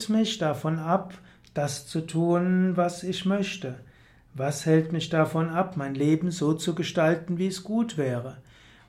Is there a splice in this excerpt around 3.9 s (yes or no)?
no